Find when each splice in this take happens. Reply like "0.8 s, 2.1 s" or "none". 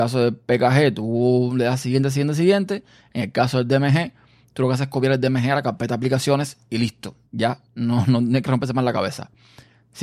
7.3 s